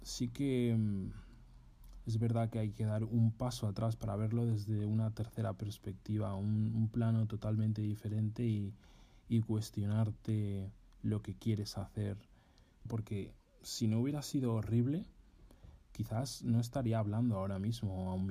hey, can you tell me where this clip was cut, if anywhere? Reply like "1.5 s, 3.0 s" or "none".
12.9 s